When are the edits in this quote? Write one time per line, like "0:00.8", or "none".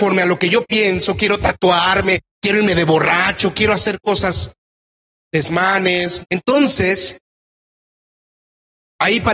0:06.2